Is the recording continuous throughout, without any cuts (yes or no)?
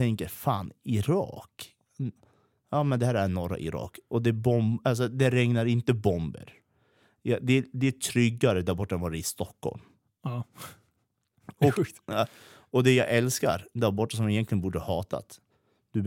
yes